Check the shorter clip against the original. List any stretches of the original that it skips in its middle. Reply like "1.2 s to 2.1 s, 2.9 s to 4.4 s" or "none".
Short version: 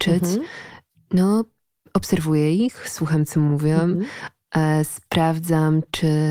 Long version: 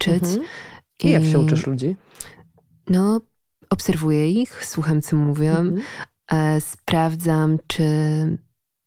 0.9 s to 2.7 s